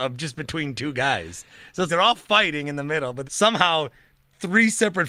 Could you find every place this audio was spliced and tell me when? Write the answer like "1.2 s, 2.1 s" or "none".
1.9 s, 3.2 s